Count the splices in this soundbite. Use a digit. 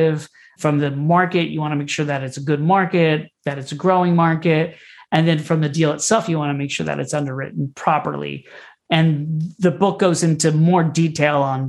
0